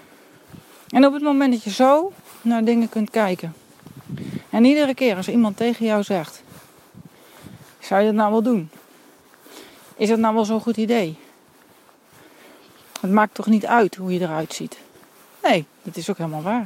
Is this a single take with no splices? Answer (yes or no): yes